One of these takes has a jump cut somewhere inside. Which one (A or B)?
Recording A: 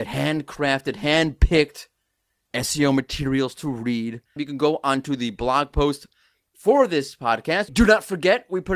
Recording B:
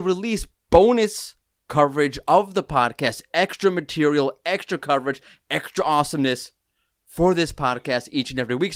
A